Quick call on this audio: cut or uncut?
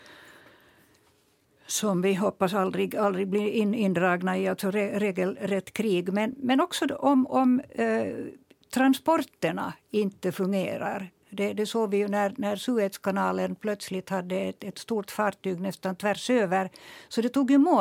uncut